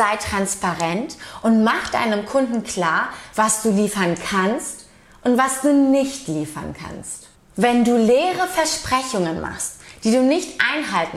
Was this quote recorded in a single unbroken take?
yes; 0 cuts

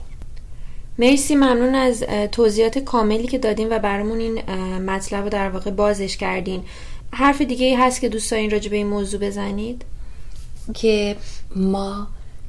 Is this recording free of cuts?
no; 1 cut; at 10.7 s

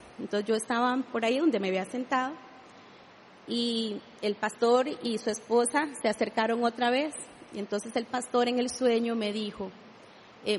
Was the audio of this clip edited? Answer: no; 0 cuts

